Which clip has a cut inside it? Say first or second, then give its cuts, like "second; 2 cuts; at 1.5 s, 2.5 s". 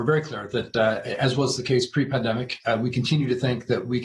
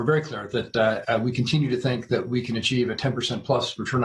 second; 1 cut; at 1.0 s